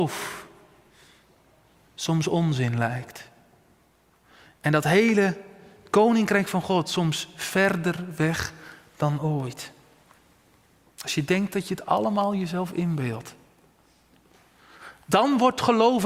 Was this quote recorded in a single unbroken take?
yes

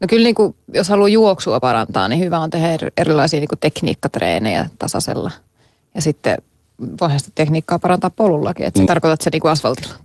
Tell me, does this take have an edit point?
yes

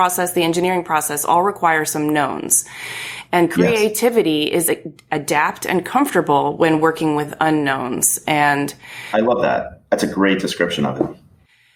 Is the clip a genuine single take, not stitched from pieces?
yes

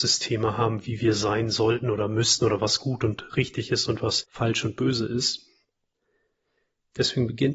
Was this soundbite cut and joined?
no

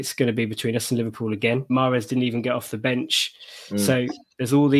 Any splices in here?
yes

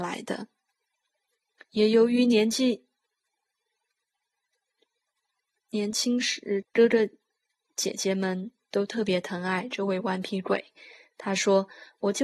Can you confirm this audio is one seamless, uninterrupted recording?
no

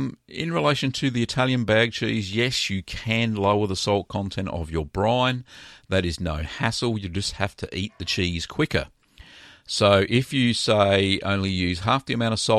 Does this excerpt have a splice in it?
no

